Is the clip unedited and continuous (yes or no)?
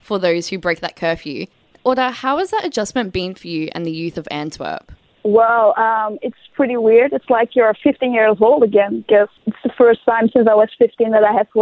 yes